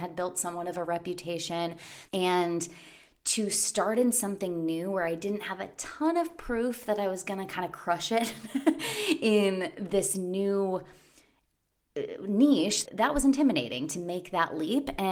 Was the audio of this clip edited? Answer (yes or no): yes